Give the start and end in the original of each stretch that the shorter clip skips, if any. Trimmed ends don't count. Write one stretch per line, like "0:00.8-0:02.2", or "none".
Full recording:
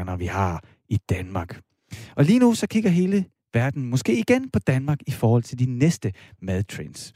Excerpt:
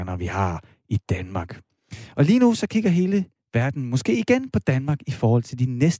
none